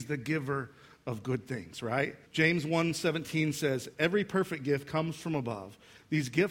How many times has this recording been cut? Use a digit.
2